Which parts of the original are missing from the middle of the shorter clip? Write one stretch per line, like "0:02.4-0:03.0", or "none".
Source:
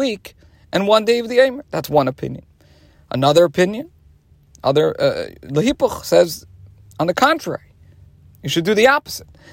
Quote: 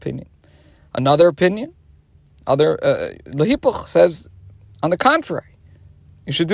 none